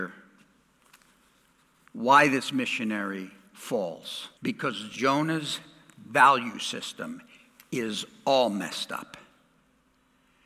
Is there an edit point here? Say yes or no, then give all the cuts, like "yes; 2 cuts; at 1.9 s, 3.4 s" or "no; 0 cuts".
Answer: yes; 1 cut; at 4.4 s